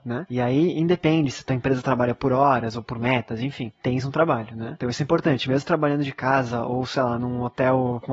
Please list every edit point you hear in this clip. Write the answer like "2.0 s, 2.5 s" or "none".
none